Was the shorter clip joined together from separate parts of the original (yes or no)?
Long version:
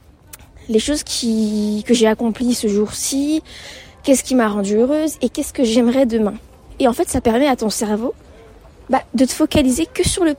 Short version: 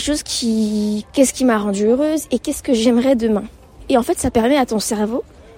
yes